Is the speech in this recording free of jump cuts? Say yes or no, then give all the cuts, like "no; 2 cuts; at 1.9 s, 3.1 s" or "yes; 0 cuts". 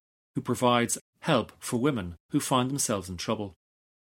no; 1 cut; at 1.0 s